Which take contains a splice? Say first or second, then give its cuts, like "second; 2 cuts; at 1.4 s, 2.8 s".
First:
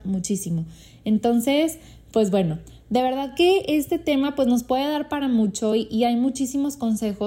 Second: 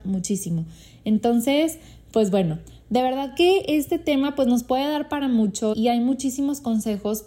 second; 1 cut; at 5.7 s